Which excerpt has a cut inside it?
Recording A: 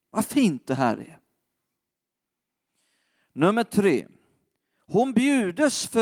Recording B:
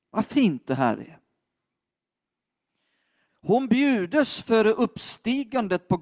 B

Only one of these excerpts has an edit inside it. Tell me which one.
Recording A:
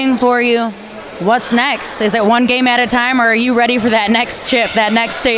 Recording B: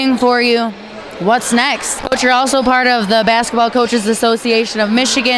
B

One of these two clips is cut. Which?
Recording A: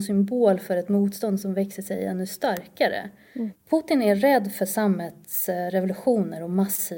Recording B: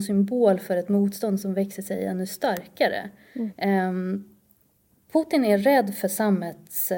A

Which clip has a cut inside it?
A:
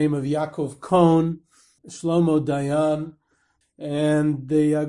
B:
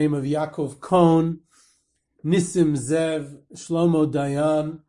A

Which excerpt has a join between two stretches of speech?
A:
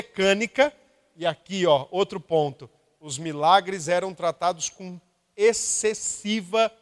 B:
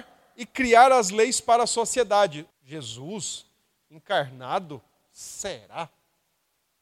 B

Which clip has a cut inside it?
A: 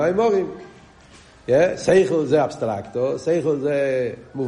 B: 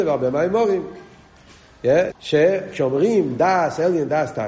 B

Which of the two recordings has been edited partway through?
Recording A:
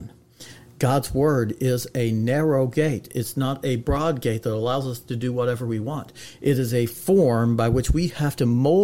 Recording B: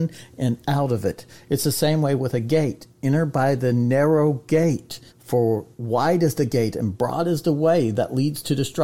B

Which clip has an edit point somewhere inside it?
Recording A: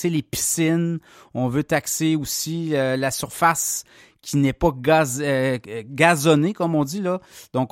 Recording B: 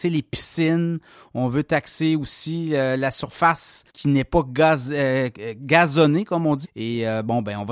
B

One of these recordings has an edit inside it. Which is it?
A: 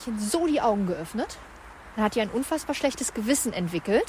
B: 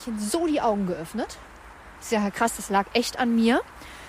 A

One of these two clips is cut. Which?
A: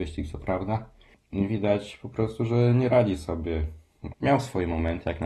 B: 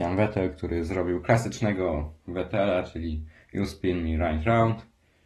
A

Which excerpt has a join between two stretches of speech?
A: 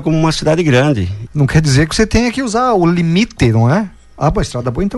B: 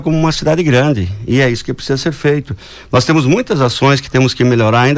A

